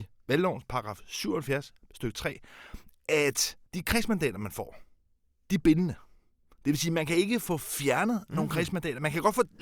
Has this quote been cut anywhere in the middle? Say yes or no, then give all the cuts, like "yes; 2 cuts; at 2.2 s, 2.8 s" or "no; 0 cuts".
yes; 1 cut; at 3.7 s